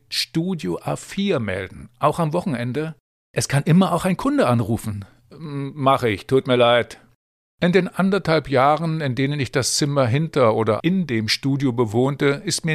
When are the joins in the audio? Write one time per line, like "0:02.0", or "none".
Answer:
0:10.8